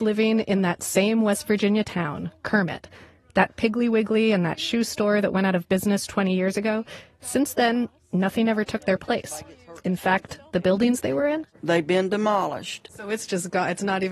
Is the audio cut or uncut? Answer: uncut